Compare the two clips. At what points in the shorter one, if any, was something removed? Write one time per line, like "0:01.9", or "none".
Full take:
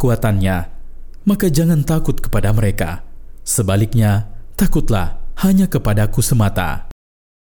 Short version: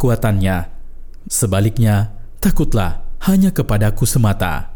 0:01.2